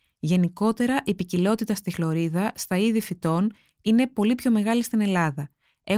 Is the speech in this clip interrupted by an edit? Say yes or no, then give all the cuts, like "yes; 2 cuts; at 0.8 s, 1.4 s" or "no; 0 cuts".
no; 0 cuts